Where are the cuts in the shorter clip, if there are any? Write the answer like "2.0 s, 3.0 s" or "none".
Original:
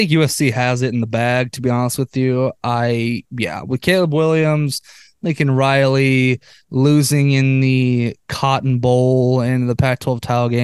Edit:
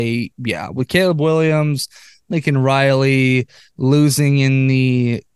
none